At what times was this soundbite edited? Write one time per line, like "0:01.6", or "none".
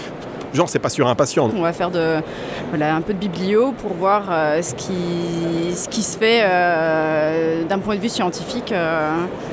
0:01.5